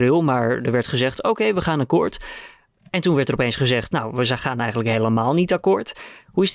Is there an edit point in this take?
no; 0 cuts

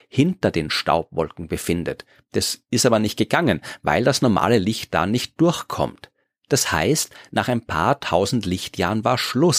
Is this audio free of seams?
yes; 0 cuts

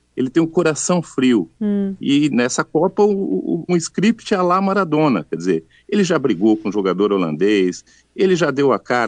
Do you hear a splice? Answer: yes; 1 cut; at 3.7 s

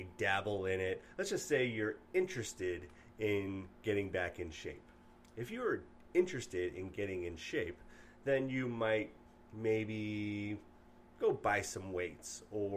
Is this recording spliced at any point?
no; 0 cuts

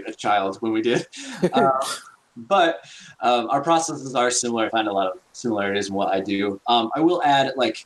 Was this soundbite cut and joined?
no; 0 cuts

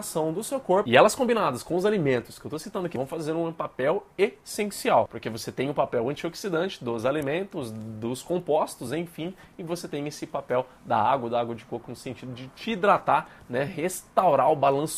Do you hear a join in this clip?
no; 0 cuts

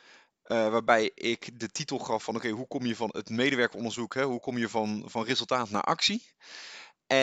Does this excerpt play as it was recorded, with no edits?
yes; 0 cuts

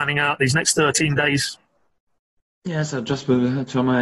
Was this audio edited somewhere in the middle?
no; 0 cuts

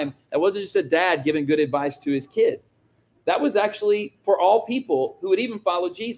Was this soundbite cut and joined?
no; 0 cuts

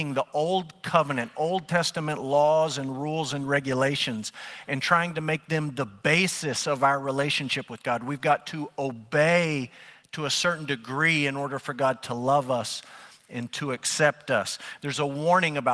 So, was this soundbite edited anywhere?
yes; 1 cut; at 14.8 s

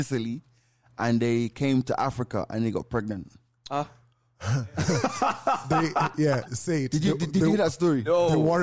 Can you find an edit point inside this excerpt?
no; 0 cuts

